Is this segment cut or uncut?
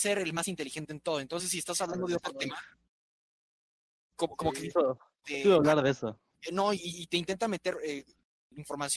uncut